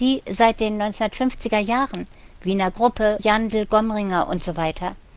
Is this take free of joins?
no; 1 cut; at 3.2 s

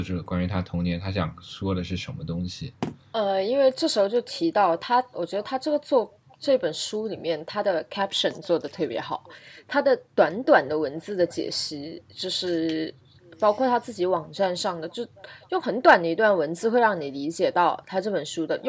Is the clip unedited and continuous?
yes; 0 cuts

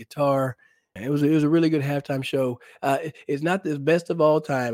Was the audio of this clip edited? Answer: yes; 1 cut; at 1.0 s

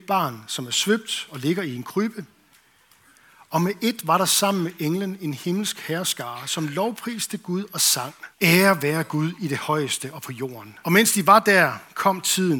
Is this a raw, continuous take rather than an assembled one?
no; 2 cuts; at 8.3 s, 10.8 s

